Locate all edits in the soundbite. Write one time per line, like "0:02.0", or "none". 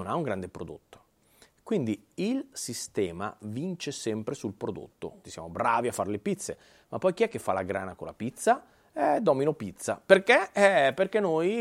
0:05.2